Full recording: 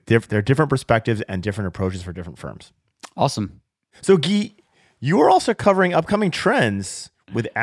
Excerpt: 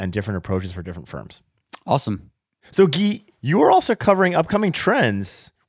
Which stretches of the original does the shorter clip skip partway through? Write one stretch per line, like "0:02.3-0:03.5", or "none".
0:04.6-0:04.9